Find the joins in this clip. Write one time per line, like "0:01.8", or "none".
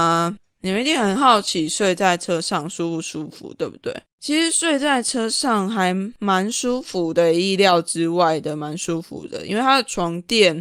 0:04.1